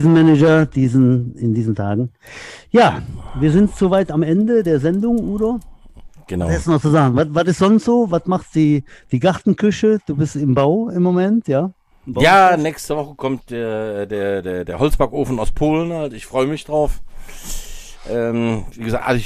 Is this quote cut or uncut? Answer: uncut